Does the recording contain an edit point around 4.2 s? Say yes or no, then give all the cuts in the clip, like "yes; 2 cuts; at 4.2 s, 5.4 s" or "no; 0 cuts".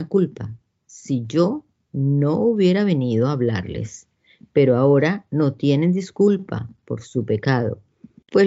no; 0 cuts